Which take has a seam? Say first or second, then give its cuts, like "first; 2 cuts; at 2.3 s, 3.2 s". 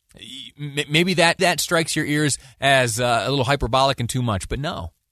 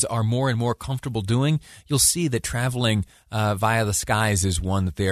first; 1 cut; at 1.4 s